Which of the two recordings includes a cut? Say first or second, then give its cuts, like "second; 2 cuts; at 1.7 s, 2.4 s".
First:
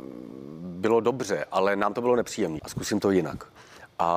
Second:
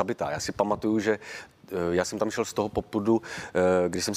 first; 1 cut; at 2.6 s